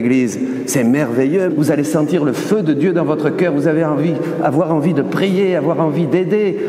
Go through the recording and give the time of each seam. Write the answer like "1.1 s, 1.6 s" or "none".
1.5 s